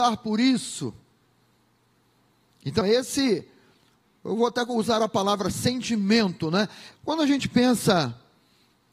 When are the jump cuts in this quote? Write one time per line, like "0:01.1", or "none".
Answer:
0:02.8
0:06.9